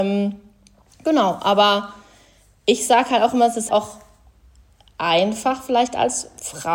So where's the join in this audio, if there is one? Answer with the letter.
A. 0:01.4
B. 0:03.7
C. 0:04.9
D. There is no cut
B